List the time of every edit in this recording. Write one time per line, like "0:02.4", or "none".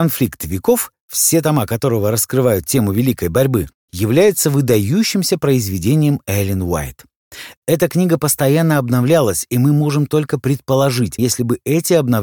0:03.8
0:07.6
0:11.2